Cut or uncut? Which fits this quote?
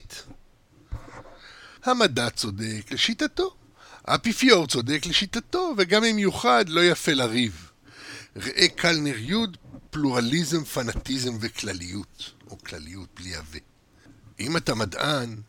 cut